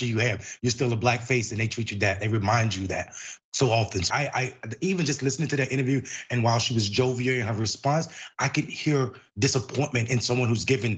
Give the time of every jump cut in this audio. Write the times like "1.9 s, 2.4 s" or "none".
4.1 s